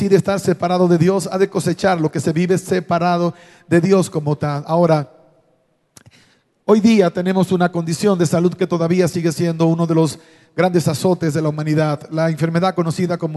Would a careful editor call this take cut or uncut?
uncut